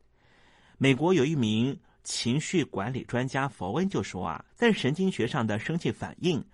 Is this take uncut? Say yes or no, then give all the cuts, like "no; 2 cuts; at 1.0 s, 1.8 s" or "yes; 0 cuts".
no; 1 cut; at 4.5 s